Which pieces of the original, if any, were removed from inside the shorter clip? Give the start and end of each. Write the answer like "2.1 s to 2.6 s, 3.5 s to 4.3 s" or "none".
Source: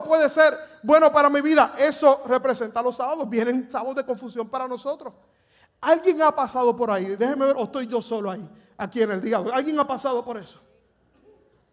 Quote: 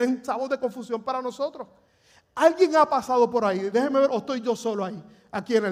none

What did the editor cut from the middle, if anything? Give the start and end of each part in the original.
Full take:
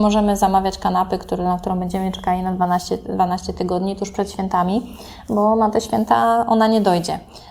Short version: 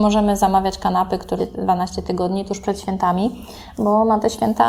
1.4 s to 2.9 s

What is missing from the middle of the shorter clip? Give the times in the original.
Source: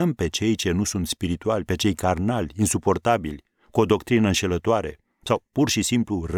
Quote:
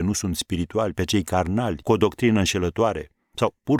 2.5 s to 3.7 s

